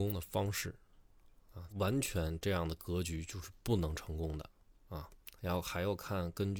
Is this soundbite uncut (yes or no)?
no